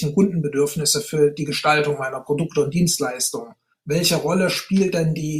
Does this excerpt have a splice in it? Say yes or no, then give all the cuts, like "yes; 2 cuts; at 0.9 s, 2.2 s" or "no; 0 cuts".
yes; 1 cut; at 3.7 s